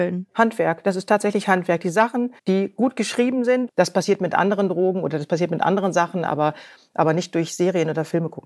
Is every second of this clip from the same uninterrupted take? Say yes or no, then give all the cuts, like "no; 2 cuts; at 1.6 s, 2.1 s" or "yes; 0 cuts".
no; 2 cuts; at 2.4 s, 3.7 s